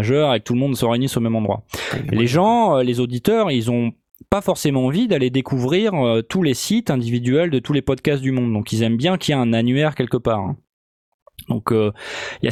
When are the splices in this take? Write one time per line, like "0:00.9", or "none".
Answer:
none